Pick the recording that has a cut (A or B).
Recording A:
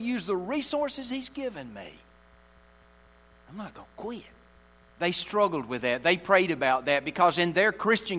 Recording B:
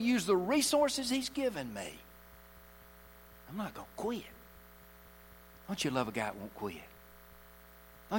A